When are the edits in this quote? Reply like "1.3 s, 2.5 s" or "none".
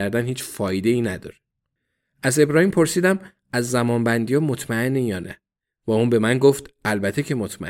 none